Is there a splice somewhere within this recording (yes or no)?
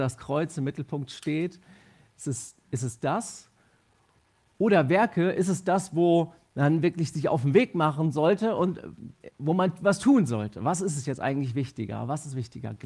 no